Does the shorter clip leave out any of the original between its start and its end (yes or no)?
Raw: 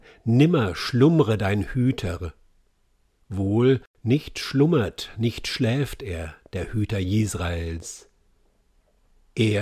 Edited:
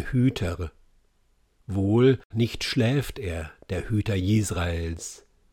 yes